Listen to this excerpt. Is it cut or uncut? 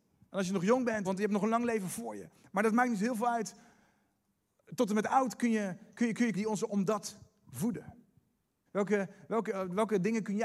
cut